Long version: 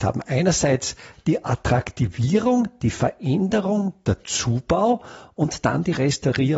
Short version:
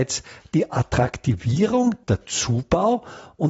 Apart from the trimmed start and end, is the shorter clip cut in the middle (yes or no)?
yes